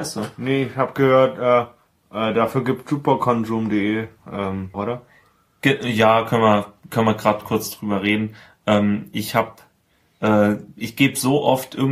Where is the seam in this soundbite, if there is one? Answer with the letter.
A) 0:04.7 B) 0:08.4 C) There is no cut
A